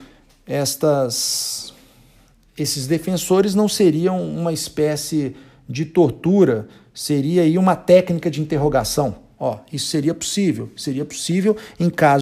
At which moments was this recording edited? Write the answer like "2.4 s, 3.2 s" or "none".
9.3 s